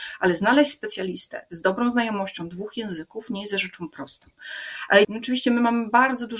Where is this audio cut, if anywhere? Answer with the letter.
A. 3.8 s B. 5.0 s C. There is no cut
B